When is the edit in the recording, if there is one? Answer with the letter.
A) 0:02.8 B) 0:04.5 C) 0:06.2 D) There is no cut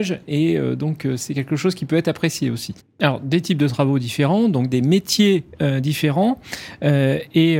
A